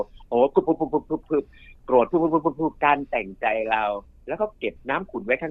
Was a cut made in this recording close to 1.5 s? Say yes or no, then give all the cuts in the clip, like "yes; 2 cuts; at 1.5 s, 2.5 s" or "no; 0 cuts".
no; 1 cut; at 2.8 s